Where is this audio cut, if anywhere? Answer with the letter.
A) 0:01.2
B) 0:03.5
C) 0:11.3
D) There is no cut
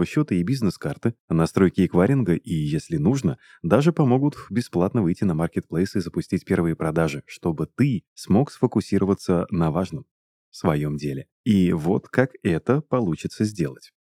C